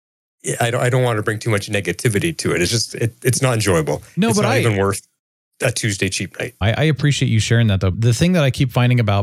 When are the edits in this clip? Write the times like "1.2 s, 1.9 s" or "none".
6.6 s, 7.9 s